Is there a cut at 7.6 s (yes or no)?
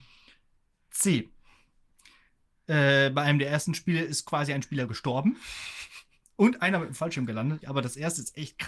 yes